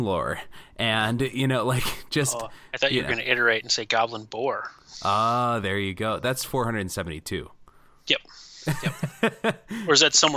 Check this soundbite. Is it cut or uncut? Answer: uncut